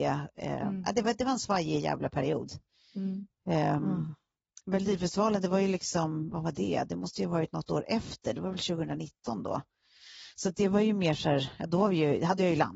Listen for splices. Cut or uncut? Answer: uncut